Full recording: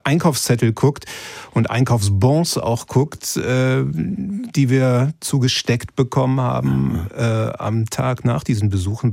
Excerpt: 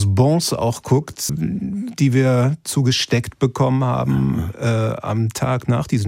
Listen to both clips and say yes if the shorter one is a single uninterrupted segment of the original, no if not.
no